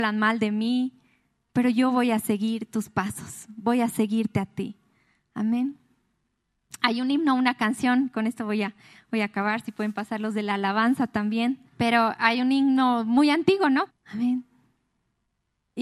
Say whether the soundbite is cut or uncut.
cut